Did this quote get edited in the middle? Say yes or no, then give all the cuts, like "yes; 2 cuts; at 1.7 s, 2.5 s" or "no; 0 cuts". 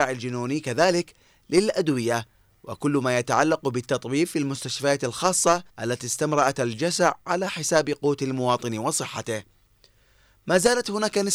yes; 1 cut; at 5.7 s